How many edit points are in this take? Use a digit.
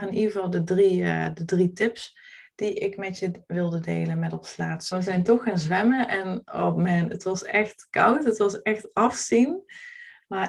1